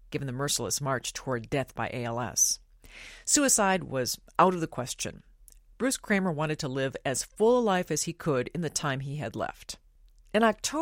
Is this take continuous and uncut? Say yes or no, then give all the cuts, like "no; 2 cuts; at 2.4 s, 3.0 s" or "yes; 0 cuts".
yes; 0 cuts